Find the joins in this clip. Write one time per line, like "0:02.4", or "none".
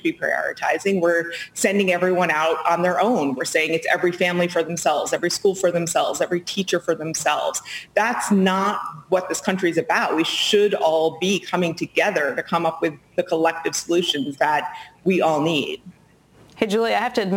none